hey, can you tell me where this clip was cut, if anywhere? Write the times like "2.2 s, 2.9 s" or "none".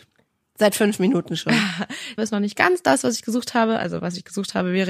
2.2 s